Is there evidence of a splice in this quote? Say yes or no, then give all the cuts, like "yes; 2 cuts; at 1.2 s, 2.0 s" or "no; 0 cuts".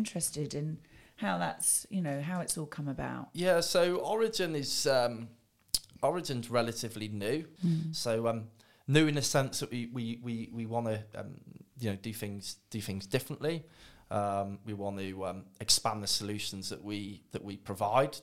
yes; 1 cut; at 7.6 s